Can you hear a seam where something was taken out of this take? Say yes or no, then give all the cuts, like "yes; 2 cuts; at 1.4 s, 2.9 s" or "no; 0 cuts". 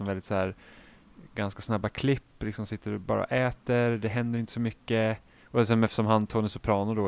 no; 0 cuts